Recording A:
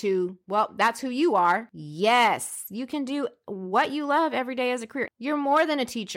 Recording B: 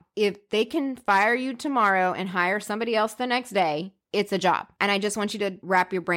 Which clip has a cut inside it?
A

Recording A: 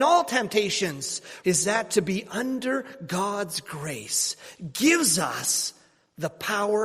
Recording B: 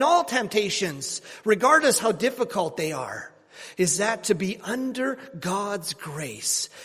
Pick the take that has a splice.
A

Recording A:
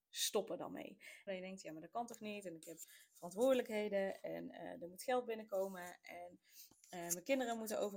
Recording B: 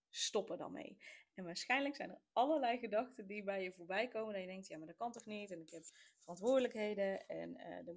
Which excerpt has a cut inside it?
A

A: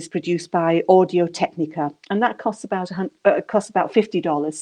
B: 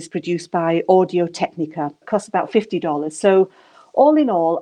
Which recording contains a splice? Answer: B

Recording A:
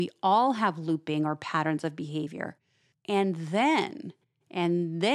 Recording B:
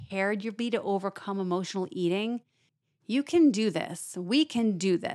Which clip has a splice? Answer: A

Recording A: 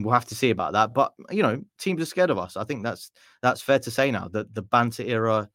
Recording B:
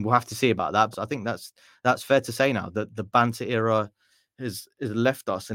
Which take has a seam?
B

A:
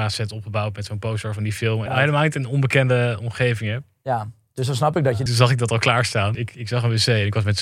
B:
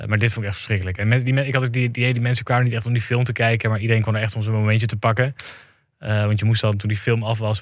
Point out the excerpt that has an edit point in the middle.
A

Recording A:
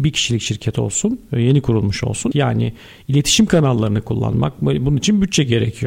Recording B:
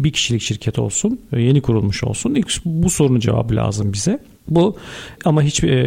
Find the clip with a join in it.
A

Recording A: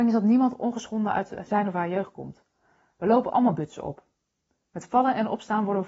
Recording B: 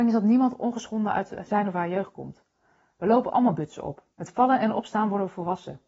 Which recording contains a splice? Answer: B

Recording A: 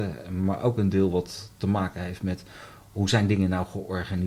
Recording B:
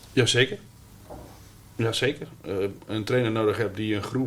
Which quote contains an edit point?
B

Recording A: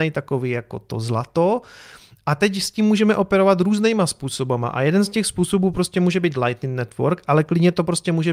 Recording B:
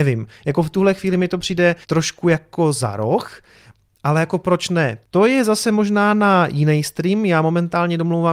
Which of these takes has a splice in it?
B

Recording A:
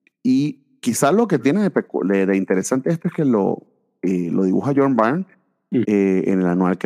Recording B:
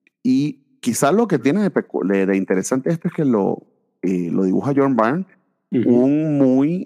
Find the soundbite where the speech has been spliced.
A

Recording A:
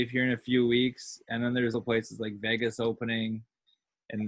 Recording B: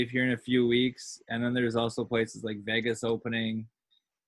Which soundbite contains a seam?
A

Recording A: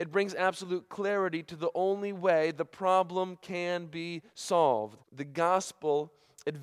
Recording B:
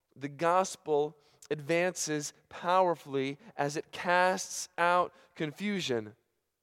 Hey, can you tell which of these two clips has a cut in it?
A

